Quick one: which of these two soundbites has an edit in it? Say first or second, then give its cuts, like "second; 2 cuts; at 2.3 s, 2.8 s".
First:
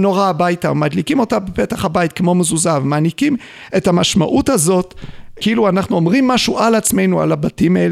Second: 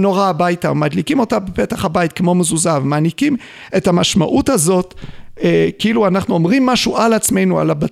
first; 1 cut; at 5.4 s